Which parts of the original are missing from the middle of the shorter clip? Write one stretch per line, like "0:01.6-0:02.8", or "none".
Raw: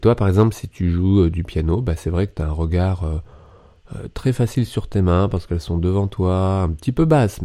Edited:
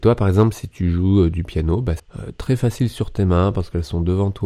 0:02.0-0:03.8